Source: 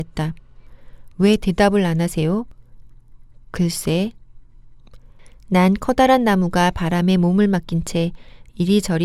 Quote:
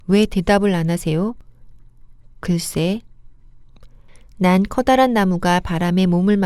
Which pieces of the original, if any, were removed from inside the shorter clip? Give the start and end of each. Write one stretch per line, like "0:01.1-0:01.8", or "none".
none